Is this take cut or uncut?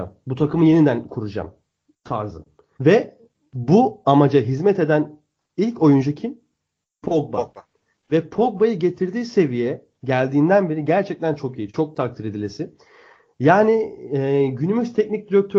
cut